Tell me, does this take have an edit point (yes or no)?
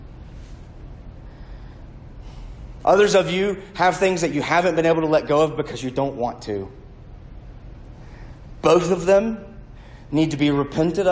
yes